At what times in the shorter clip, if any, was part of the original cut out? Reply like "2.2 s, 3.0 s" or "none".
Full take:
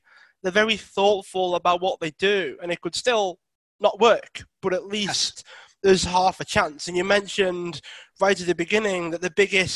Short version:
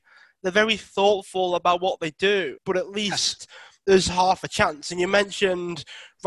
2.6 s

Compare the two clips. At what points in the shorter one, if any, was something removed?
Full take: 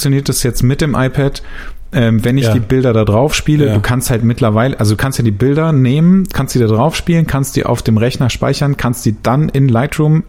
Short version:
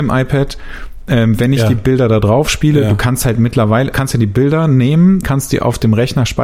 3.9 s, 5.2 s

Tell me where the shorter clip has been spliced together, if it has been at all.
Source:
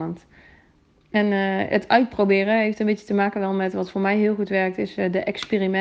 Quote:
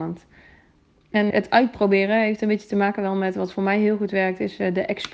1.3 s

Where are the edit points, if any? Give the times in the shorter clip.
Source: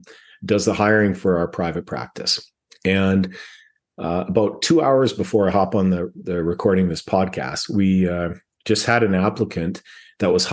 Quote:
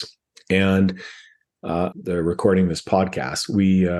1.9 s

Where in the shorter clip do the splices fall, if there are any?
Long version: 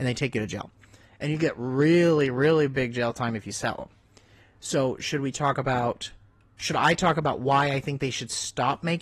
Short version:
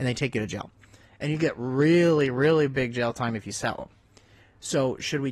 none

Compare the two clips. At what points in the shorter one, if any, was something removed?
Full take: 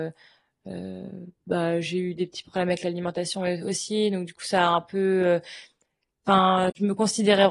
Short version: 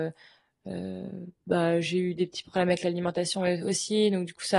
none

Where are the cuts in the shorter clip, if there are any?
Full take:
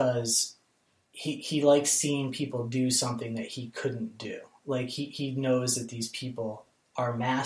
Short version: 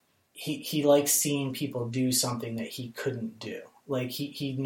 none

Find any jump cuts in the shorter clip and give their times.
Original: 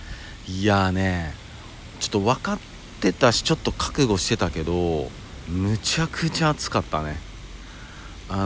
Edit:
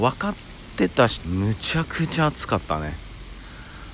1.2 s

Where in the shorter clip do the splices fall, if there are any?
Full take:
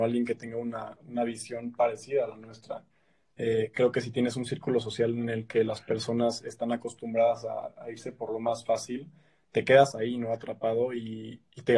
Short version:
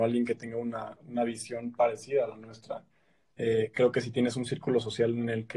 none

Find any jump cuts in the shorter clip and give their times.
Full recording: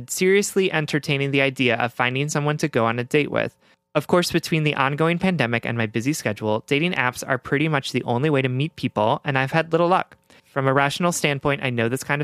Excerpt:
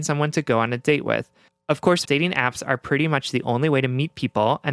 2.0 s

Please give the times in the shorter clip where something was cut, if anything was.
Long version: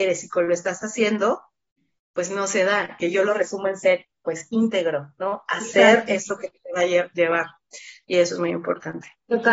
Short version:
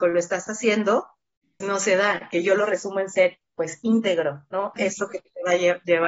1.6 s, 4.8 s

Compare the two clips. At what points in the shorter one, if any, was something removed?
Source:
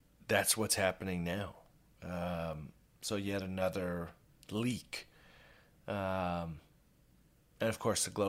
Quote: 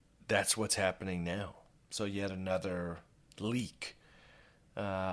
1.8 s

